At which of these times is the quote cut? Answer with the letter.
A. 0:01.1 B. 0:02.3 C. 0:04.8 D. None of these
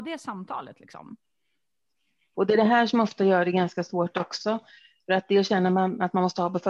B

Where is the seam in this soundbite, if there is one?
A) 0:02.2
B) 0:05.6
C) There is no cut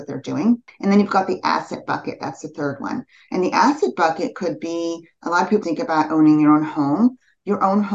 B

